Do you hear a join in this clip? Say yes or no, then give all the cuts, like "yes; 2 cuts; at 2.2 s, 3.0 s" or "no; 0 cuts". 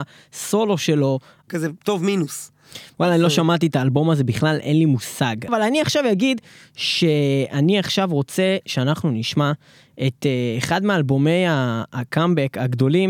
yes; 2 cuts; at 1.5 s, 5.5 s